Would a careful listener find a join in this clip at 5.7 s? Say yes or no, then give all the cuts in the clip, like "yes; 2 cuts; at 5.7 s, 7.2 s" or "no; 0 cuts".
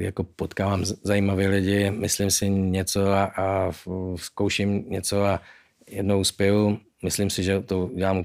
no; 0 cuts